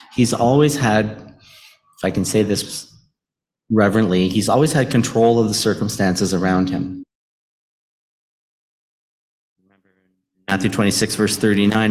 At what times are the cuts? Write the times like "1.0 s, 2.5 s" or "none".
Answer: none